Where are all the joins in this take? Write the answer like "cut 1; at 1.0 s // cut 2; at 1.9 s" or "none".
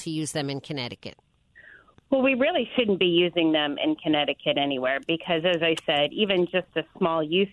none